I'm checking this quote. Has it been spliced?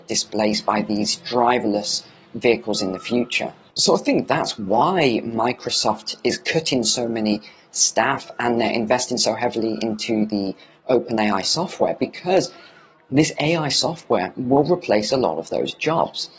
no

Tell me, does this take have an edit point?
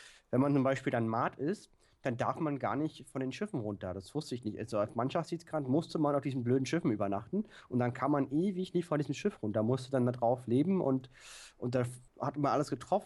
yes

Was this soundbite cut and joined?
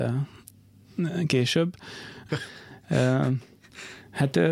yes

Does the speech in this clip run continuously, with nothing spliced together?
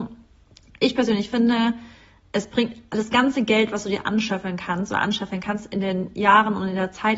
yes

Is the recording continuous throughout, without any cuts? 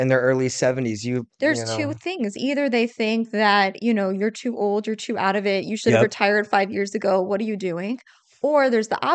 yes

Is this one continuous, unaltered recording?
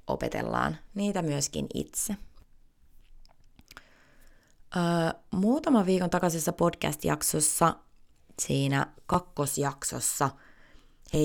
yes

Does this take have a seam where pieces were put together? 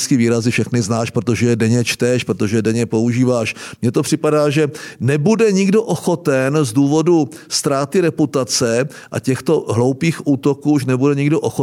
no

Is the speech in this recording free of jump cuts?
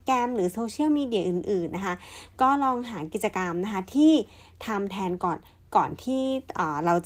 yes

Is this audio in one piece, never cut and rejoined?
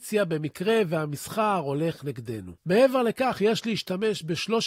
no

